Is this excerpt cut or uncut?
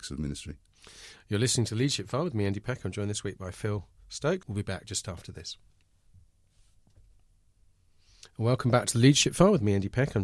cut